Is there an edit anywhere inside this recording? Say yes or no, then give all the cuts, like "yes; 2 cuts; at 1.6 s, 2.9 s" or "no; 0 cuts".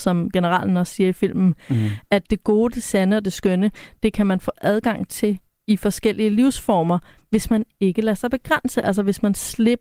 no; 0 cuts